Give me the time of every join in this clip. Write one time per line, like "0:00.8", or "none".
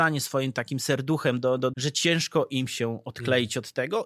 0:01.7